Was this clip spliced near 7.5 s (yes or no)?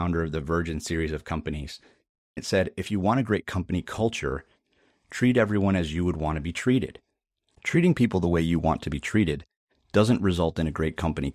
yes